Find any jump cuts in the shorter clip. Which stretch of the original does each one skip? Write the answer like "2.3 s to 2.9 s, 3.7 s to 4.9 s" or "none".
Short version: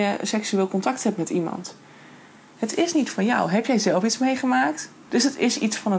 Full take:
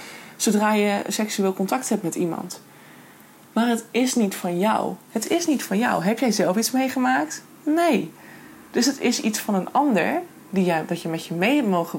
3.4 s to 5.1 s, 7.6 s to 8.7 s